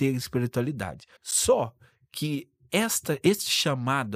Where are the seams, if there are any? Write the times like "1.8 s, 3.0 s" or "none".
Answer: 1.2 s